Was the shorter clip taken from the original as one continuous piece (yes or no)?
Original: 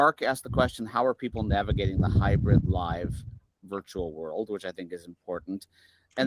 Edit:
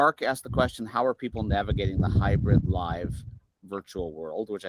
yes